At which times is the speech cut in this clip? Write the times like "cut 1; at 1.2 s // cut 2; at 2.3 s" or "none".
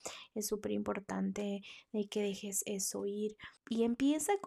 cut 1; at 3.6 s